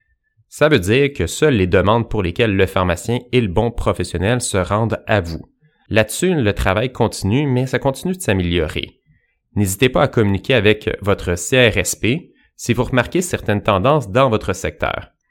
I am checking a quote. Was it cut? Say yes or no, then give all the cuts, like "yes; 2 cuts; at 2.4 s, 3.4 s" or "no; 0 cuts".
no; 0 cuts